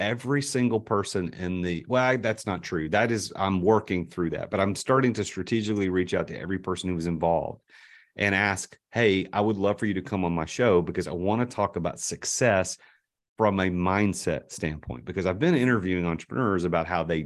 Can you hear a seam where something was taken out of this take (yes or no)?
no